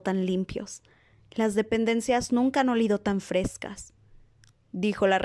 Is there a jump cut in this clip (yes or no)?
no